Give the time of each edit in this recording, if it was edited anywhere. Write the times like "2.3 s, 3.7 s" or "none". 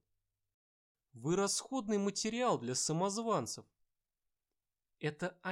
0.9 s